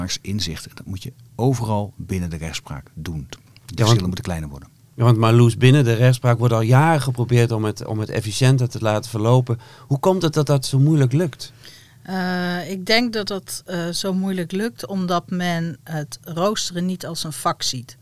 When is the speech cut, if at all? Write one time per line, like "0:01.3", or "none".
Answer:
0:03.3